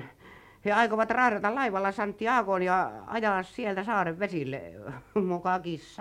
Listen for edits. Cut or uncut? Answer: uncut